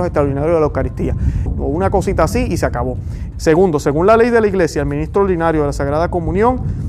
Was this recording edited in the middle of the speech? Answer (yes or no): yes